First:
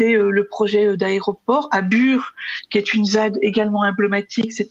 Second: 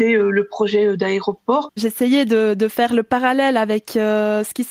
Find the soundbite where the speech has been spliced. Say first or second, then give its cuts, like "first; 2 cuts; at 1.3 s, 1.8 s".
second; 1 cut; at 1.7 s